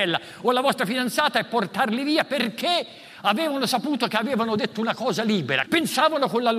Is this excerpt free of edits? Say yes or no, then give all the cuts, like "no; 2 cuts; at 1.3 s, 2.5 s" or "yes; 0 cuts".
no; 1 cut; at 5.7 s